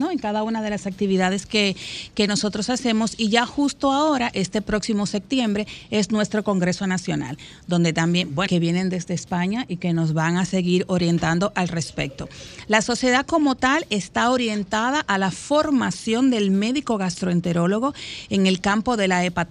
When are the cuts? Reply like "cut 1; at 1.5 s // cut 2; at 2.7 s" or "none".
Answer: cut 1; at 8.5 s